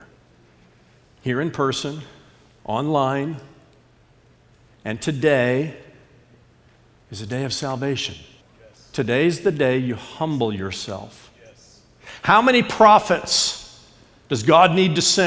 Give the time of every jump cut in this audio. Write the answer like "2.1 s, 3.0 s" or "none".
8.4 s